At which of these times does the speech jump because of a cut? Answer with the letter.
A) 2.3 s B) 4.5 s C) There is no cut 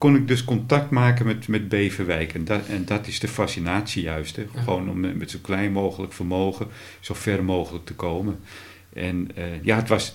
C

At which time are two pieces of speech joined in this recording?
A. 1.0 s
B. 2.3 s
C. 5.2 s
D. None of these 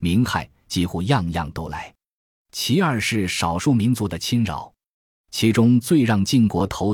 B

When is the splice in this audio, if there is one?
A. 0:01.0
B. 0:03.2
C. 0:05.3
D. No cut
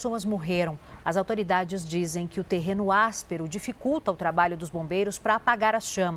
A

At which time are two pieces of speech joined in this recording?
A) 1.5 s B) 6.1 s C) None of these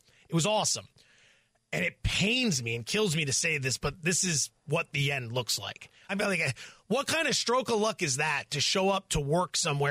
B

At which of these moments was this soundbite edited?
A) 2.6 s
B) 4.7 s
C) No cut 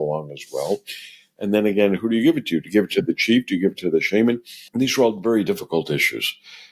B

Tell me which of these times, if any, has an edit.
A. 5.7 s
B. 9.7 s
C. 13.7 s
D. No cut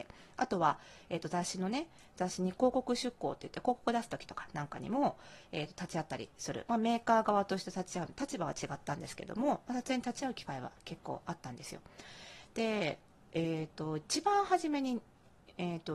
D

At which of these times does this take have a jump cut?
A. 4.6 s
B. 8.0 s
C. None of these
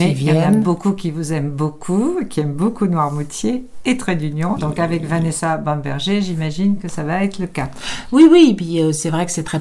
A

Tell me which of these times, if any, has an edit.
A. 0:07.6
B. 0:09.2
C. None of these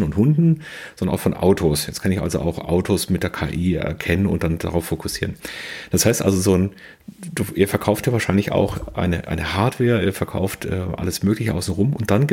C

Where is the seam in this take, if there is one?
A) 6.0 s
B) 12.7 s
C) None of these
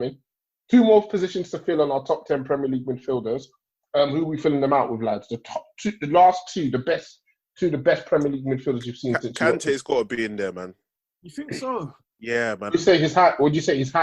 B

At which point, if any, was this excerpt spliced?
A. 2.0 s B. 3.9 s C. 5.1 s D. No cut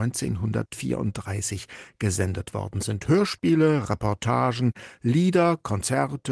D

